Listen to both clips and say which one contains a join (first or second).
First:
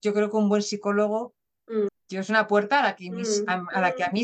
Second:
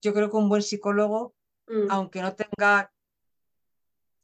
first